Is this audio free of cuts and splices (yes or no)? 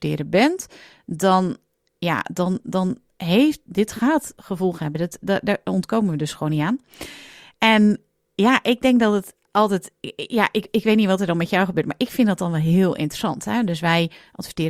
yes